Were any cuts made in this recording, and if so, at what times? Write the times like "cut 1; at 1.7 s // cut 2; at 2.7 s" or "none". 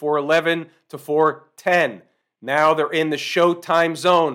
none